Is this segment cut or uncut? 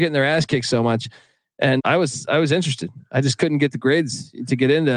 cut